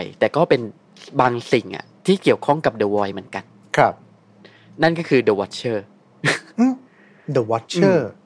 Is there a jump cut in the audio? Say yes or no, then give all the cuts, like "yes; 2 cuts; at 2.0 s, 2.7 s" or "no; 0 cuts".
no; 0 cuts